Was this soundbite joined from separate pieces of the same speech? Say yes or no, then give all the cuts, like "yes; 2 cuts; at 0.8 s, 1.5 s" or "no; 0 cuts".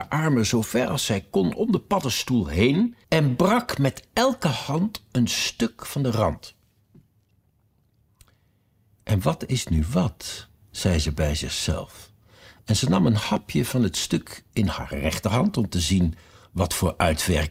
yes; 1 cut; at 3.0 s